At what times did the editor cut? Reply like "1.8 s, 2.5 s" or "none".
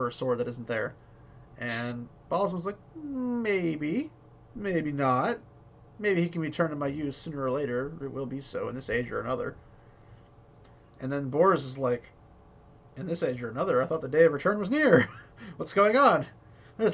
none